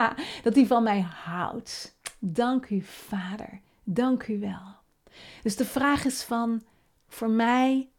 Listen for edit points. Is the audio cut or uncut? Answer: uncut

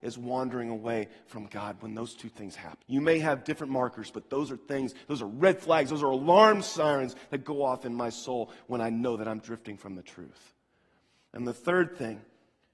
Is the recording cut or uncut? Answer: cut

